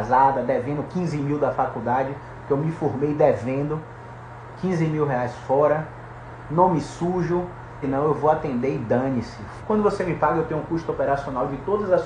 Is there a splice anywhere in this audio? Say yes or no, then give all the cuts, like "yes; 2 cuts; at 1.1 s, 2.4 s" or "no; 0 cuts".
yes; 2 cuts; at 7.8 s, 9.6 s